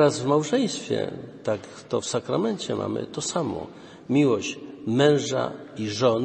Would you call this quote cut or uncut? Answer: uncut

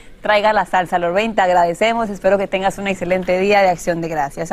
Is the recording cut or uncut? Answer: uncut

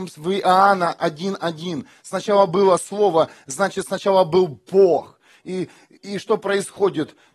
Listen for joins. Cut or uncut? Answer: uncut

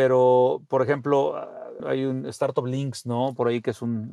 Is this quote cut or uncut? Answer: cut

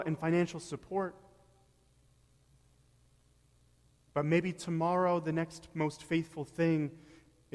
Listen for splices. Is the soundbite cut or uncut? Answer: uncut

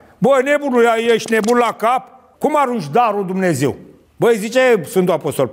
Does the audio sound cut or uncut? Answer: cut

